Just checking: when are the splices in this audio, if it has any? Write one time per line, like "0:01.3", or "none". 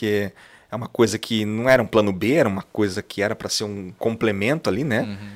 none